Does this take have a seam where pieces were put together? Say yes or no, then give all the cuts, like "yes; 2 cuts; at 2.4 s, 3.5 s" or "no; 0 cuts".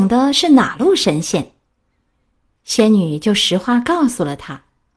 yes; 1 cut; at 2.5 s